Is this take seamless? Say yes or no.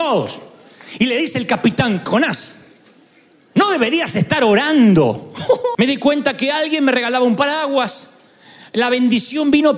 no